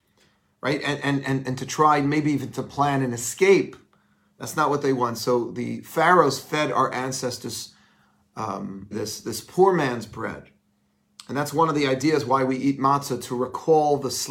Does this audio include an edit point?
yes; 1 cut; at 8.9 s

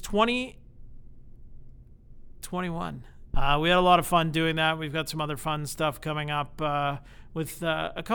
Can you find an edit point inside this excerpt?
yes; 1 cut; at 3.3 s

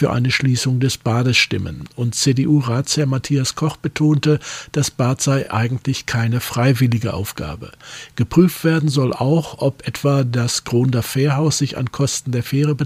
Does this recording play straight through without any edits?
yes; 0 cuts

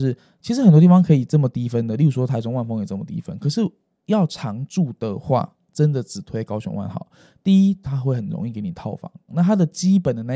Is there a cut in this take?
yes; 2 cuts; at 7.8 s, 9.3 s

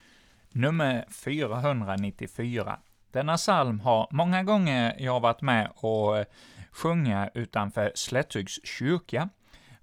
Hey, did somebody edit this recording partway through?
no; 0 cuts

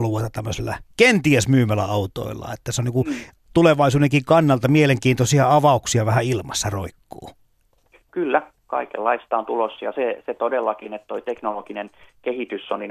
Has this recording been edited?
no; 0 cuts

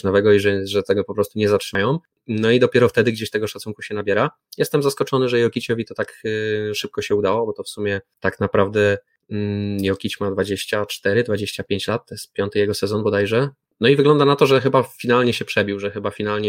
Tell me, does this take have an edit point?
no; 0 cuts

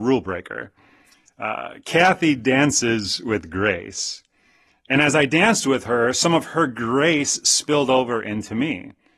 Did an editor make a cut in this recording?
no; 0 cuts

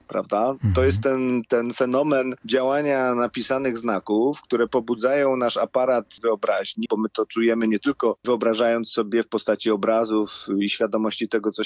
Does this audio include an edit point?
yes; 1 cut; at 6.9 s

